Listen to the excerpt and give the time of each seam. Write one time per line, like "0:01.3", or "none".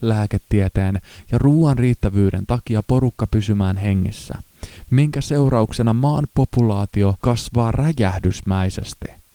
0:07.2